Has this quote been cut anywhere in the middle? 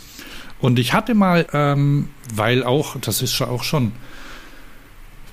yes; 1 cut; at 1.5 s

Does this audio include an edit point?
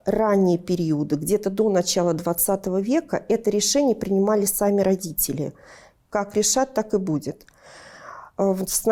yes; 1 cut; at 6.1 s

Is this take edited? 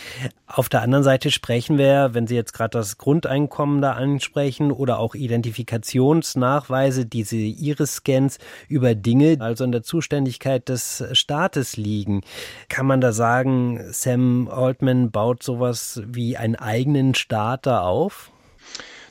yes; 1 cut; at 9.4 s

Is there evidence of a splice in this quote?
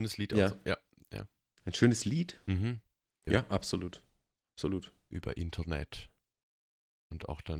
yes; 1 cut; at 3.3 s

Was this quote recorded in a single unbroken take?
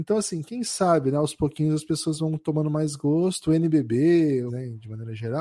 no; 1 cut; at 4.5 s

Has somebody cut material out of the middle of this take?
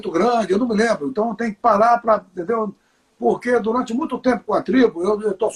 no; 0 cuts

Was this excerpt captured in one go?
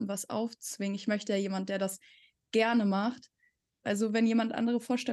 no; 1 cut; at 3.8 s

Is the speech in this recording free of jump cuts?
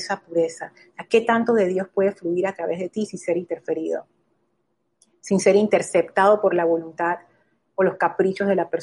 yes; 0 cuts

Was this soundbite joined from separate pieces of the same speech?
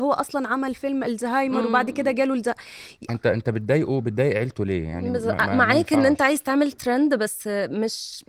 yes; 1 cut; at 3.1 s

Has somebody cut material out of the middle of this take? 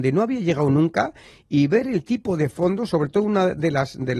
no; 0 cuts

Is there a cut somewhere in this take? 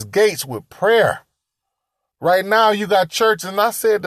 yes; 1 cut; at 2.1 s

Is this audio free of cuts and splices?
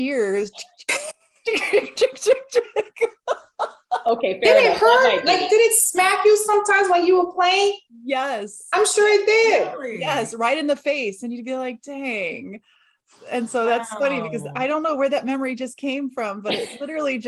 yes; 0 cuts

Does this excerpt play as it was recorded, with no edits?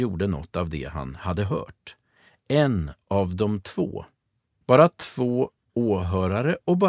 no; 1 cut; at 4.6 s

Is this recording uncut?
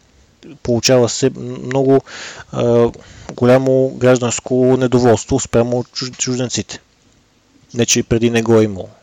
yes; 0 cuts

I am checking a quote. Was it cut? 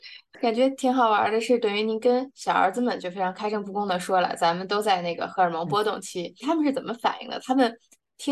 yes; 1 cut; at 6.4 s

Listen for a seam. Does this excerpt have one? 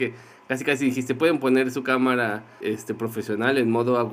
yes; 1 cut; at 2.6 s

